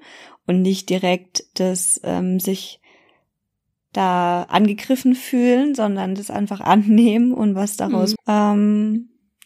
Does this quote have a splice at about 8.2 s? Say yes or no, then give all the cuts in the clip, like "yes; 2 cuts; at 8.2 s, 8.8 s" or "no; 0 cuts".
yes; 1 cut; at 8.2 s